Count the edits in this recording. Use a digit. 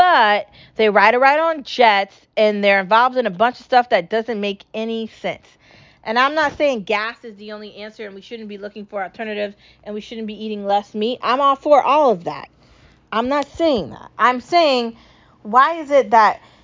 0